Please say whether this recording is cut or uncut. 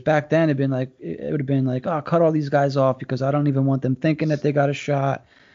uncut